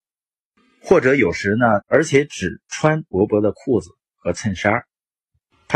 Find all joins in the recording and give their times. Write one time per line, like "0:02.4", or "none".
0:01.8

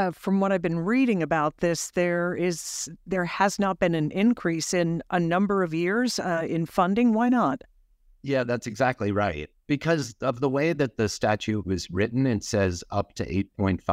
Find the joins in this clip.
none

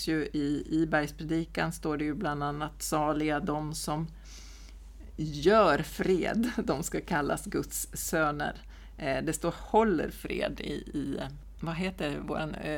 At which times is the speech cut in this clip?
none

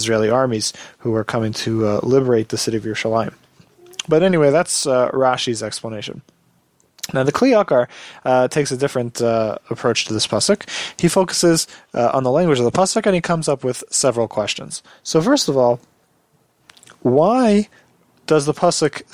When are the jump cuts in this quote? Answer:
none

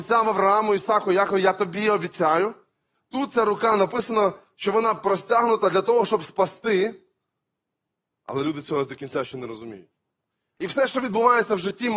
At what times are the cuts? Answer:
0:08.1
0:10.6

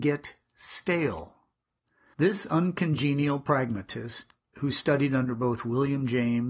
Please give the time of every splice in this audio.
0:02.1

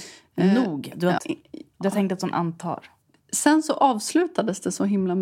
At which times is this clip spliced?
0:01.2

